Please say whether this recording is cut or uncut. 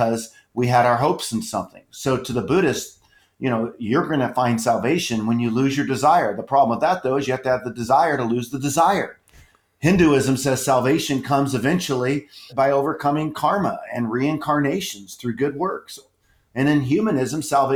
cut